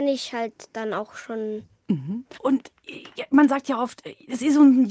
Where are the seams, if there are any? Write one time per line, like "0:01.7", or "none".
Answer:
0:02.3